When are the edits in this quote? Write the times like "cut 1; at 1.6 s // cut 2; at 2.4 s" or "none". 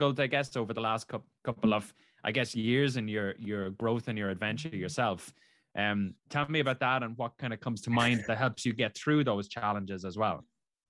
cut 1; at 6.2 s

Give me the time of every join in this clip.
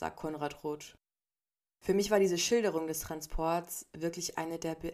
cut 1; at 1.7 s

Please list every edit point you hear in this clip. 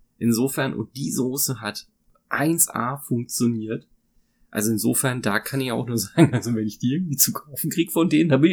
none

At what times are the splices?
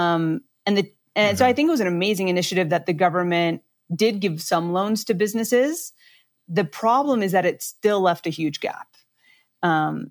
none

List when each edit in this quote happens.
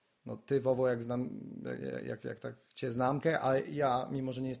cut 1; at 3.2 s

